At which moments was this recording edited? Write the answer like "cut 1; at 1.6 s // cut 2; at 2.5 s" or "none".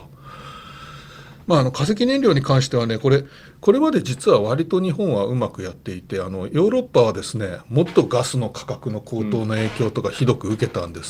cut 1; at 1.4 s